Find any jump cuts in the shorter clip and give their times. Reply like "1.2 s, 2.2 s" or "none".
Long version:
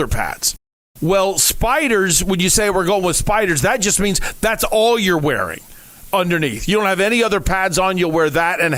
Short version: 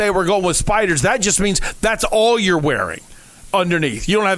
none